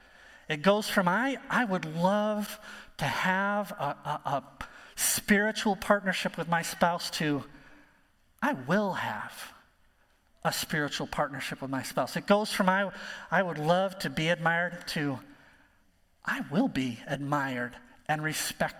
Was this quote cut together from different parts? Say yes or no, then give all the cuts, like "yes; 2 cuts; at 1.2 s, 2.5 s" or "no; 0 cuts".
no; 0 cuts